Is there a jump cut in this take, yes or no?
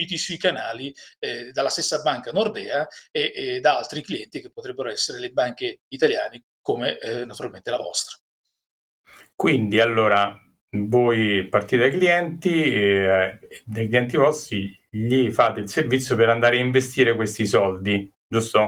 no